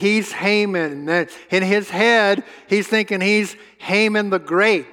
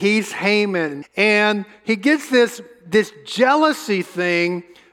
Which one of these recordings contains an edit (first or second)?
second